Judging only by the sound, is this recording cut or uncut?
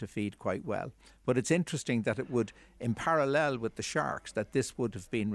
uncut